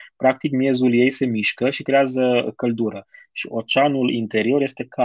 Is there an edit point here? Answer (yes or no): no